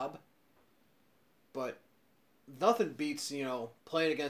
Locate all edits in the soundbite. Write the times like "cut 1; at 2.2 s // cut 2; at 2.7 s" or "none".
cut 1; at 1.4 s